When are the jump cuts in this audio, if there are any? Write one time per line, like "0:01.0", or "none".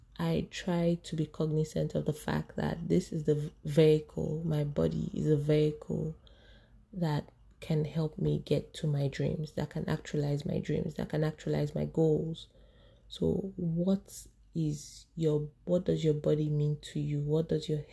none